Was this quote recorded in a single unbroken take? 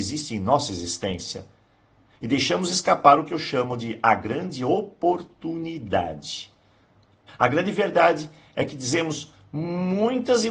no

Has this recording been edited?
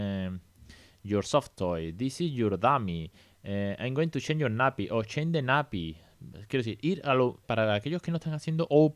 yes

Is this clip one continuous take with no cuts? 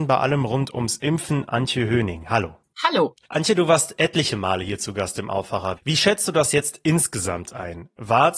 no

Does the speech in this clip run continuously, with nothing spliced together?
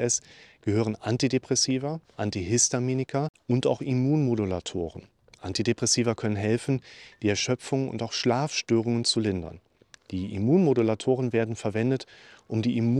yes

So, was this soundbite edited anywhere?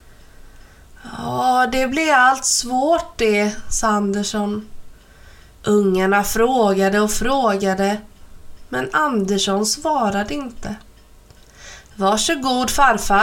yes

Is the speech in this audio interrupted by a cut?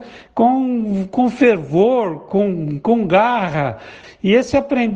no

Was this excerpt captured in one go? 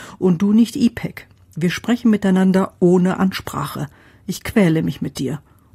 yes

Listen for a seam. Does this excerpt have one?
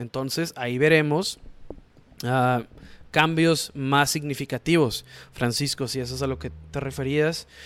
no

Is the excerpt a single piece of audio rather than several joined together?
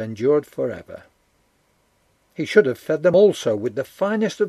yes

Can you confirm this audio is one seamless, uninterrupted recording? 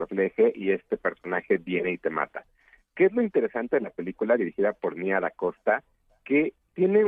yes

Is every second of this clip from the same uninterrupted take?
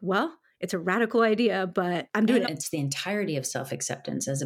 no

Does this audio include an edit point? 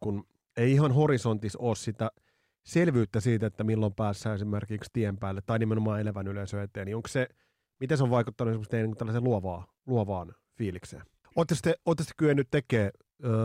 yes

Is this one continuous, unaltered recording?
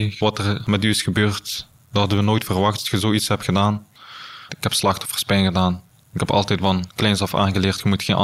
no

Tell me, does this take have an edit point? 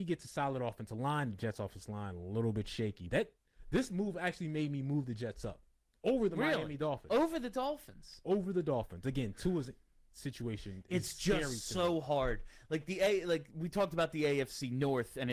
yes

